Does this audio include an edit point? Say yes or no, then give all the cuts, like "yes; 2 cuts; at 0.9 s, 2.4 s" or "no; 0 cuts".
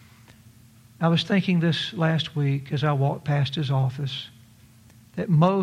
no; 0 cuts